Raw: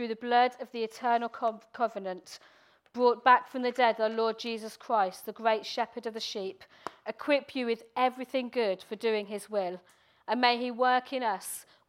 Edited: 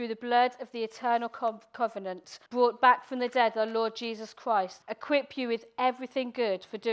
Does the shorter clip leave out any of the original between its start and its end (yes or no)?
yes